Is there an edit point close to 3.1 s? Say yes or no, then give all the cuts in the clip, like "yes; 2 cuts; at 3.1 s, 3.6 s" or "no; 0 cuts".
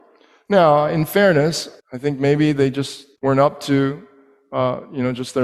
yes; 2 cuts; at 1.8 s, 3.1 s